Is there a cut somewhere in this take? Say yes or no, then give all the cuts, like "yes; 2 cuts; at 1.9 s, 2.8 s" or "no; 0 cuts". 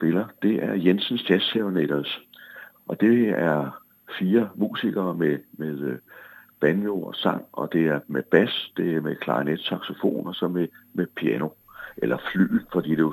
no; 0 cuts